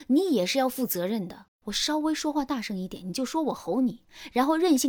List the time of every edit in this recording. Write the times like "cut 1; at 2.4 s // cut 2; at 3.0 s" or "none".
cut 1; at 1.5 s